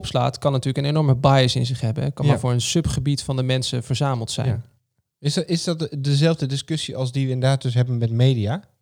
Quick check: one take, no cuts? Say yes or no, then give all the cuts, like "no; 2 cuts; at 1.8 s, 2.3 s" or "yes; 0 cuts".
yes; 0 cuts